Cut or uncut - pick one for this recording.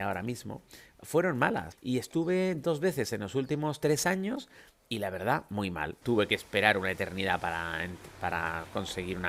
cut